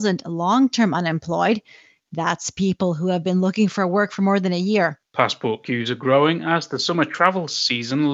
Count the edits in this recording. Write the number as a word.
one